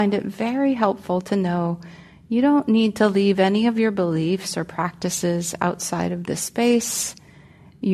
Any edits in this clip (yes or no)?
no